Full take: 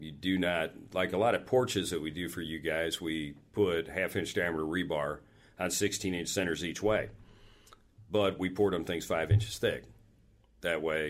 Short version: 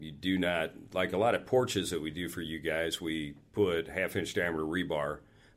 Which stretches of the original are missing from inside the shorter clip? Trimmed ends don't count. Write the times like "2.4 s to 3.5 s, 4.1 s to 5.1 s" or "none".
none